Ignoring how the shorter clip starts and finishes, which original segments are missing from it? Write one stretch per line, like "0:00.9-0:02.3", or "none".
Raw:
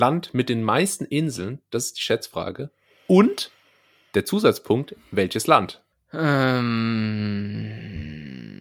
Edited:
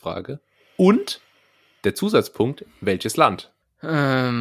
none